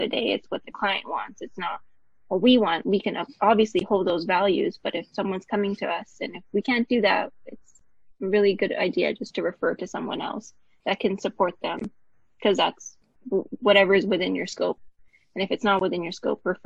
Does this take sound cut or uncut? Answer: uncut